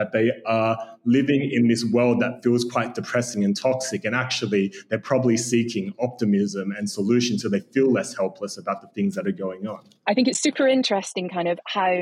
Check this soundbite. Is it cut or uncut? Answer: uncut